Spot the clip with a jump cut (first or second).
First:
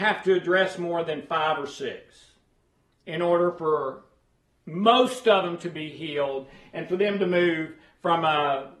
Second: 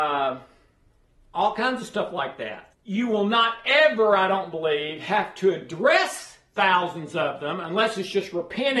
second